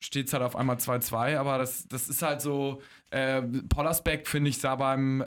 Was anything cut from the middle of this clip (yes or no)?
no